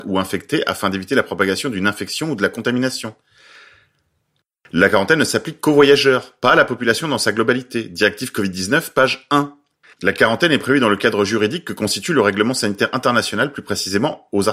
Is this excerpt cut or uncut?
uncut